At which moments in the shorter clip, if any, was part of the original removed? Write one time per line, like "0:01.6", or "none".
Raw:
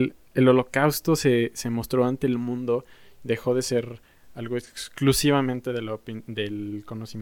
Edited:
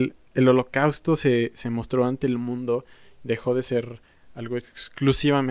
none